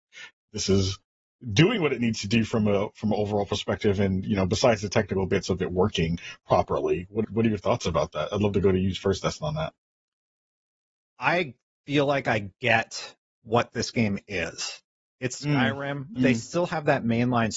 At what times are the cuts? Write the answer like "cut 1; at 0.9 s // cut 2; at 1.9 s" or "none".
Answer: cut 1; at 7.2 s // cut 2; at 16.2 s